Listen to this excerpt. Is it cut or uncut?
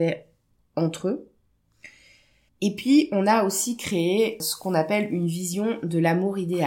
cut